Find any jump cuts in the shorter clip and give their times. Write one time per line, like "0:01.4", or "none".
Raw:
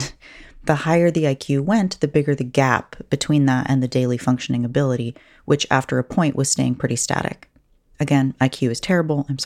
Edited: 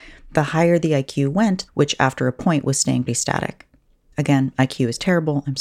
0:01.7
0:03.1

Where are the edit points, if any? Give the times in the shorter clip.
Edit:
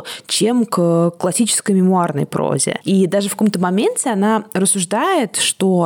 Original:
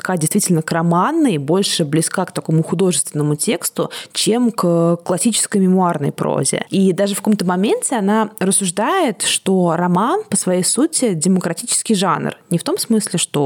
none

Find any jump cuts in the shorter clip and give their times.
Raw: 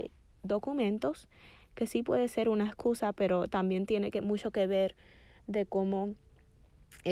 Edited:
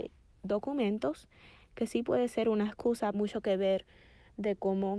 0:03.1

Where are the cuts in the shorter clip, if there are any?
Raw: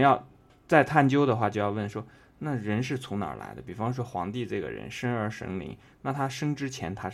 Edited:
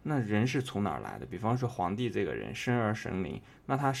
none

